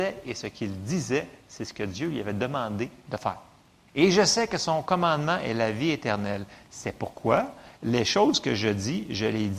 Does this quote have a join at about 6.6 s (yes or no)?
no